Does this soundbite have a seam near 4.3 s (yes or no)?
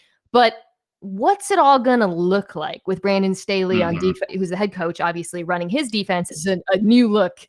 yes